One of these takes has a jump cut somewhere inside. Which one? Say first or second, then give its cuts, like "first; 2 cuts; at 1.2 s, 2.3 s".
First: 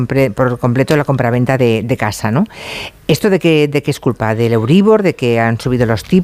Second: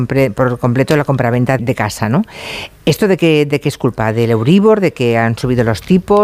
second; 1 cut; at 1.6 s